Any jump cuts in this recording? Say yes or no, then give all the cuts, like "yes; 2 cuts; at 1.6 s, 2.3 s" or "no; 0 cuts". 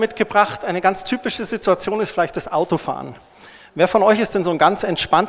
no; 0 cuts